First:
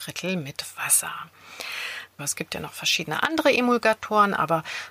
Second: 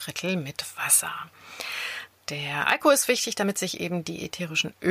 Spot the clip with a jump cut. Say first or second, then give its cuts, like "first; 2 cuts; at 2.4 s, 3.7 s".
first; 1 cut; at 2.2 s